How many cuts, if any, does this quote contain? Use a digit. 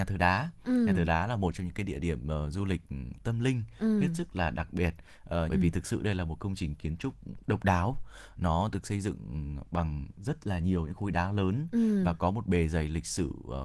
1